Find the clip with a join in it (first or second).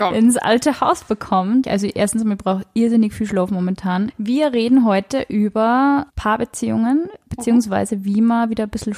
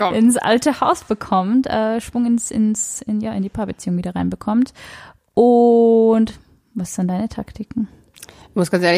first